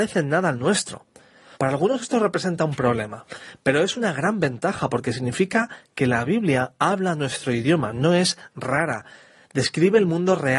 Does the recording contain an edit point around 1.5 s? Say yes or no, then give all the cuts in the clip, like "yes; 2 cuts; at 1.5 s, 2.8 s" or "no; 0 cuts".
yes; 1 cut; at 1.5 s